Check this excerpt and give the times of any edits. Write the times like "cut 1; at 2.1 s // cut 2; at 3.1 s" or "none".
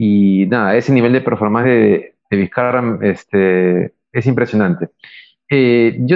none